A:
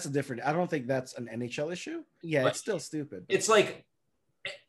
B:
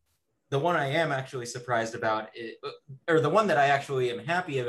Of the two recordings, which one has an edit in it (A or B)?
A